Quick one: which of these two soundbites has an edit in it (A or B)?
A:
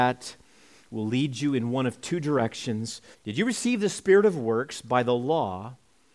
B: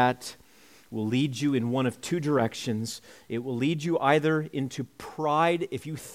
A